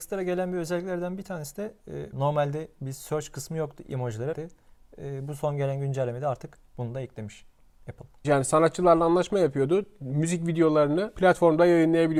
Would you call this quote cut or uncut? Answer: cut